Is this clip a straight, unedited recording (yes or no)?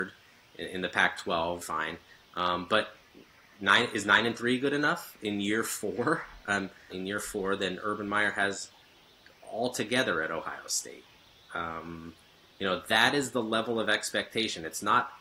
no